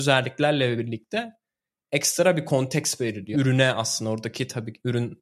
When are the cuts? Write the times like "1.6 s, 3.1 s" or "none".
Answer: 3.3 s